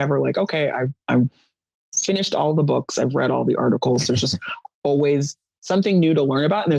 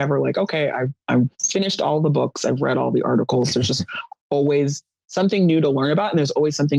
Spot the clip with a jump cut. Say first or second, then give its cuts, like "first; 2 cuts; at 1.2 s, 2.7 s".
second; 1 cut; at 1.3 s